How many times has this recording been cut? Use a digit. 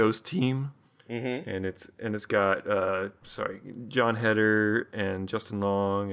1